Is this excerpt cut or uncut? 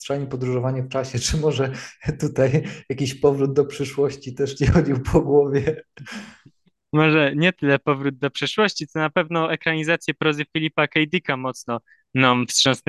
uncut